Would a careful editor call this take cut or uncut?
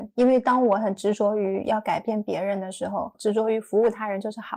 cut